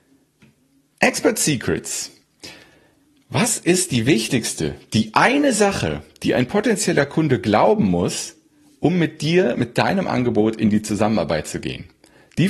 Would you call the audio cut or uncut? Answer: uncut